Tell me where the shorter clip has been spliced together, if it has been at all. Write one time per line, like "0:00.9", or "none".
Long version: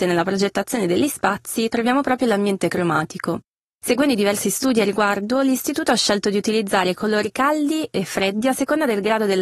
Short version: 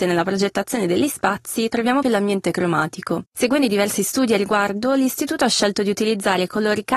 0:02.0
0:03.3